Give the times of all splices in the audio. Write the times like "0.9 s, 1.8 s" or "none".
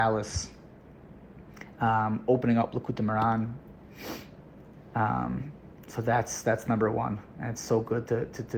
none

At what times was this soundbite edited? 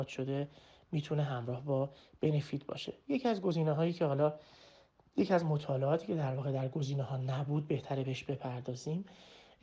none

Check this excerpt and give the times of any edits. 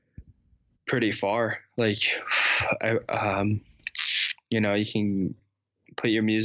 none

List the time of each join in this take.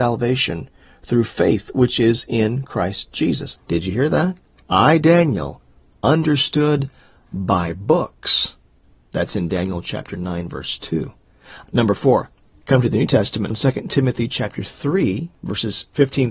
3.6 s, 11.6 s, 13.5 s

